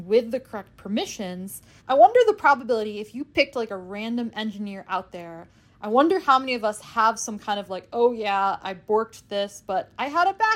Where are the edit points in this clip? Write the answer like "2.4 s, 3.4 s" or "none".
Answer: 1.8 s